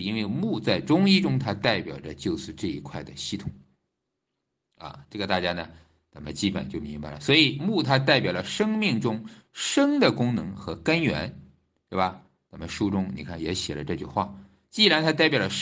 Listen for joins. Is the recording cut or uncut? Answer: uncut